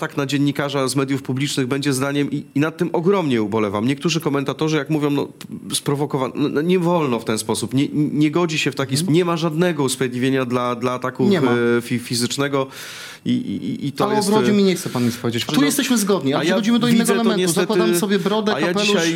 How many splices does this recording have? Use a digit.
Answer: 2